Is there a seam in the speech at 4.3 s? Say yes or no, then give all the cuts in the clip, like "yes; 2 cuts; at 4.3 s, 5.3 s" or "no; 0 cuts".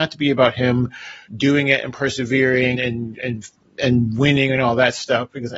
no; 2 cuts; at 1.3 s, 2.7 s